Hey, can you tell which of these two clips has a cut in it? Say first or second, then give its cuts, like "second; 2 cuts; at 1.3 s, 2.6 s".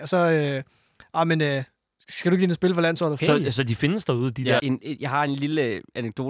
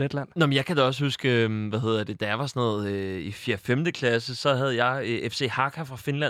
first; 2 cuts; at 3.2 s, 4.6 s